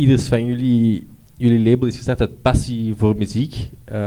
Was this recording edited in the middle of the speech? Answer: no; 0 cuts

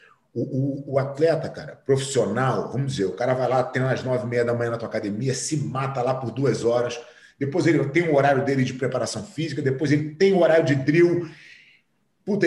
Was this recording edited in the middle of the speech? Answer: no; 0 cuts

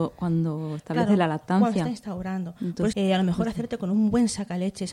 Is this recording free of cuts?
no; 1 cut; at 2.9 s

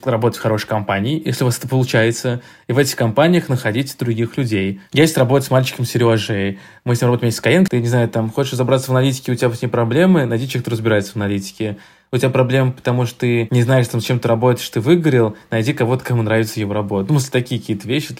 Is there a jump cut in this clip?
yes; 1 cut; at 7.7 s

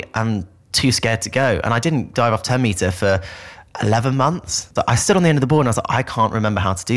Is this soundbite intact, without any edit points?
no; 2 cuts; at 2.1 s, 4.8 s

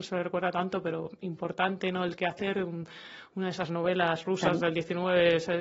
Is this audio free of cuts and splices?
yes; 0 cuts

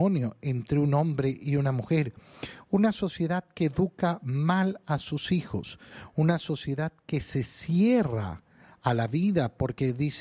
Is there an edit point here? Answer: no; 0 cuts

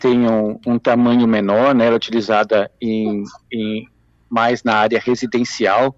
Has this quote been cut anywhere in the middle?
no; 0 cuts

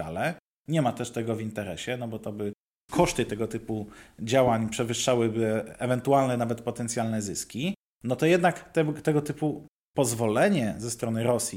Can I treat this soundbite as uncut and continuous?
yes; 0 cuts

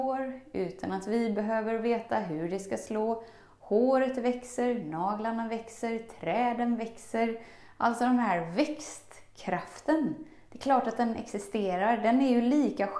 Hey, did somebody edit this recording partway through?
no; 0 cuts

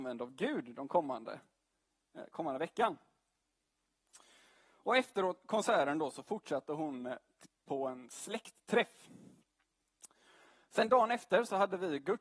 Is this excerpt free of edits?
yes; 0 cuts

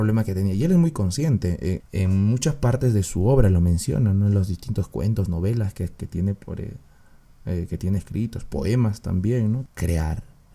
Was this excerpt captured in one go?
no; 2 cuts; at 1.8 s, 9.7 s

